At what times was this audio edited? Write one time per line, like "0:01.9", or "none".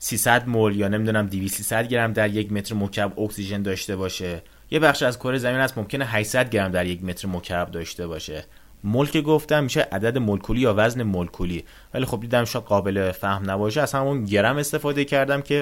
none